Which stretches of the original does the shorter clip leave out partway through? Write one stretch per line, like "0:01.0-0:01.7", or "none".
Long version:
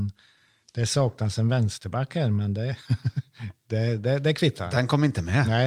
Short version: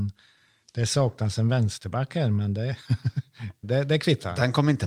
0:03.6-0:04.0